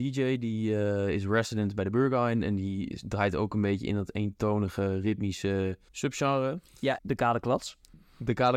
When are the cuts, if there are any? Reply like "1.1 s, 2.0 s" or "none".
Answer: 5.9 s, 7.0 s